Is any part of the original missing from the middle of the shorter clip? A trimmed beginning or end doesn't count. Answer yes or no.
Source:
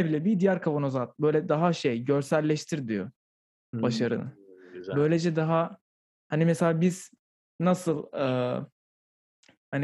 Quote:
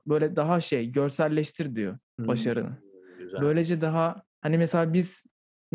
yes